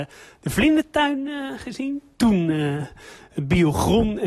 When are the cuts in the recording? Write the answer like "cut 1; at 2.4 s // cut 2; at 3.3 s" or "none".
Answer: none